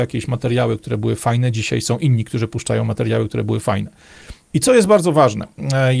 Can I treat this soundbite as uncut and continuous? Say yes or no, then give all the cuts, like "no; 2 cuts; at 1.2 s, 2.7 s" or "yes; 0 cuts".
no; 1 cut; at 4.5 s